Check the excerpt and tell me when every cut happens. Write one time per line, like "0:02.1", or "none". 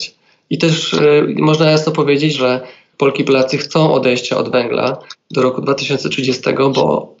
0:02.3